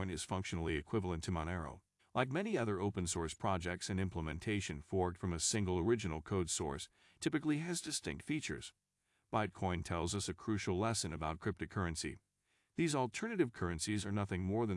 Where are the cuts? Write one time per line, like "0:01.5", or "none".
0:02.0

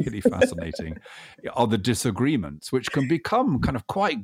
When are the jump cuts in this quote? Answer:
none

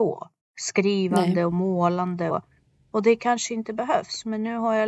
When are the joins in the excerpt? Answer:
0:02.3

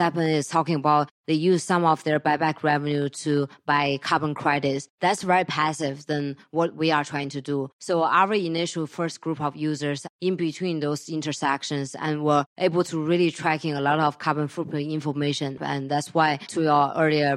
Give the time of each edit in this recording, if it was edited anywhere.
0:15.6

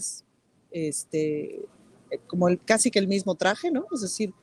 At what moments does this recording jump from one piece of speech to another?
none

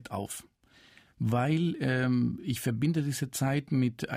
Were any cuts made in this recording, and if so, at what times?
none

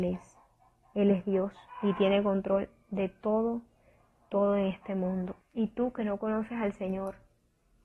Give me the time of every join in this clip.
0:05.4

